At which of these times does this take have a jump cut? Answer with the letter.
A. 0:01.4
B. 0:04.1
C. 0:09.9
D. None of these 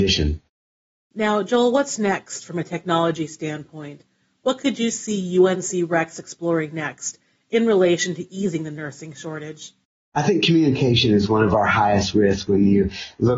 D